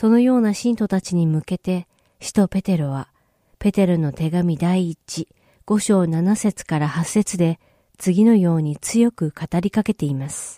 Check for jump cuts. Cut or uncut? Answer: uncut